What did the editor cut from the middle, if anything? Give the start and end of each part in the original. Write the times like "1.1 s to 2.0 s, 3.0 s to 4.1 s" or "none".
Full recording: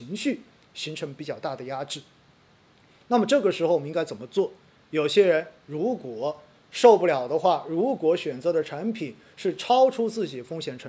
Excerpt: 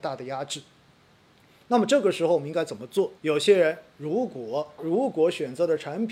4.6 s to 4.9 s, 6.5 s to 7.6 s